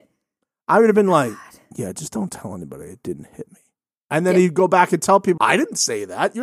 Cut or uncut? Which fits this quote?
cut